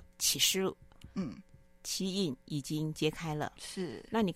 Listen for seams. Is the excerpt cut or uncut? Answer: uncut